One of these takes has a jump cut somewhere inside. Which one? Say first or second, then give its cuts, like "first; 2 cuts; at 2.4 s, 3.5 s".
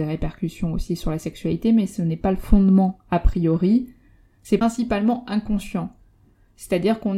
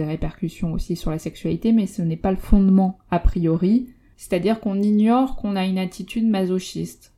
second; 1 cut; at 4.1 s